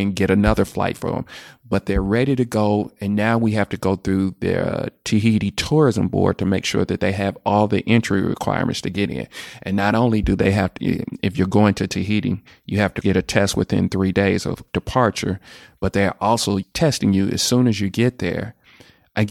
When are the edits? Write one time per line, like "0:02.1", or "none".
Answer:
0:13.0